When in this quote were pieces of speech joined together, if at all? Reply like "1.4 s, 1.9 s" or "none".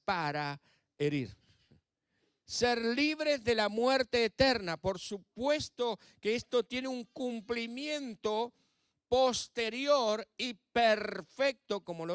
2.4 s